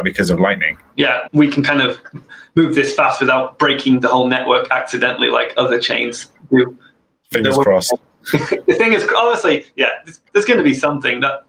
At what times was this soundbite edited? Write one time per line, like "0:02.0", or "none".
none